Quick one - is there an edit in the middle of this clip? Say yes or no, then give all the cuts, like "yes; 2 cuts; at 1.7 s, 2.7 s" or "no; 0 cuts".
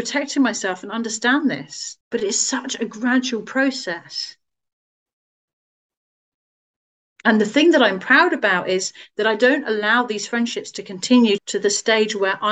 yes; 2 cuts; at 2.0 s, 11.4 s